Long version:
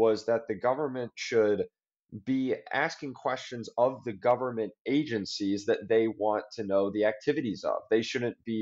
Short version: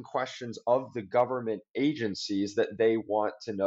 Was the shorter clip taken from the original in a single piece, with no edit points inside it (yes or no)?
yes